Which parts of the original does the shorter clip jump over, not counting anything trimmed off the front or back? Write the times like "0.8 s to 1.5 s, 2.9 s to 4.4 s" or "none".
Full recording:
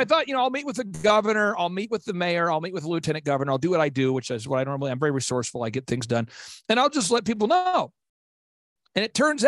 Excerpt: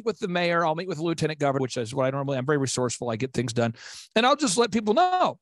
3.5 s to 4.1 s